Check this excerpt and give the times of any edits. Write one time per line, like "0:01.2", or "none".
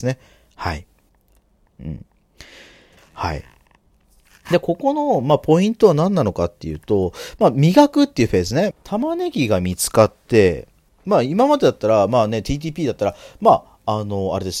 0:03.0
0:08.7